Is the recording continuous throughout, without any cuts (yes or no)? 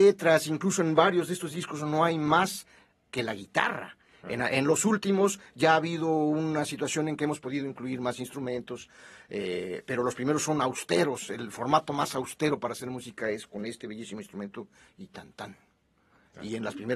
yes